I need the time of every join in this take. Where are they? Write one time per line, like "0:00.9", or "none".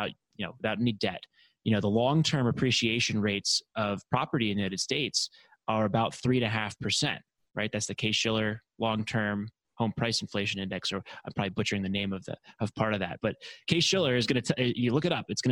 none